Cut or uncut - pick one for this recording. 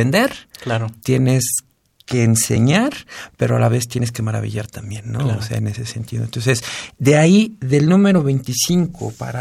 uncut